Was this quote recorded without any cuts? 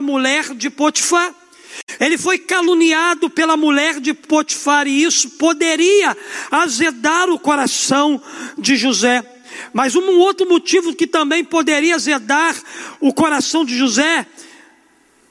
no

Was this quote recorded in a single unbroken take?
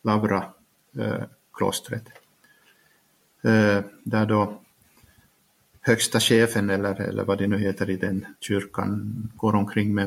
yes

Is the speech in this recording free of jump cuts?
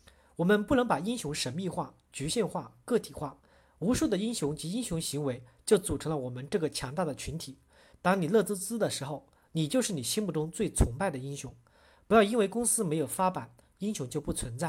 no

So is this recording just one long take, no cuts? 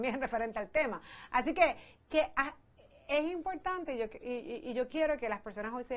yes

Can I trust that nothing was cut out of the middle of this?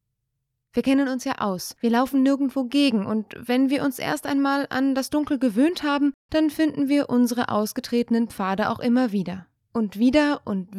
yes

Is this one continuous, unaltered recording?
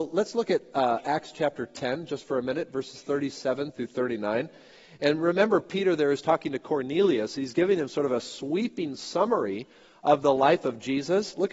yes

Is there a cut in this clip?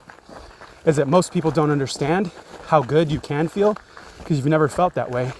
no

